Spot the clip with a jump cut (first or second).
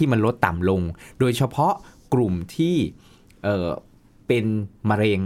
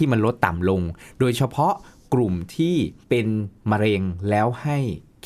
second